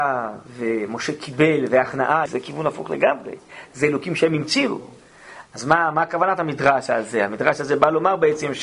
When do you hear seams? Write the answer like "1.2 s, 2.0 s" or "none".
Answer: 2.3 s, 5.4 s